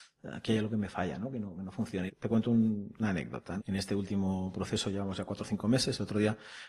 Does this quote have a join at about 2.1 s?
yes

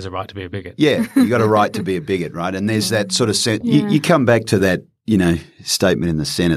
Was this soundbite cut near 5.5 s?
no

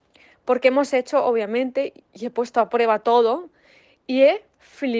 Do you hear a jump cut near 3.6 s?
no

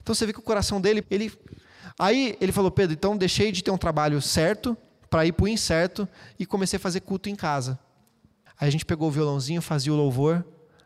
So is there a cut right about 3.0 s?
no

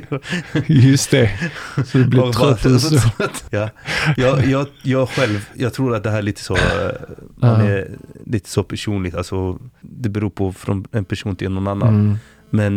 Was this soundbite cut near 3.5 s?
yes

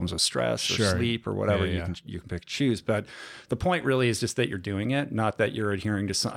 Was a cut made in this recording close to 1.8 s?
no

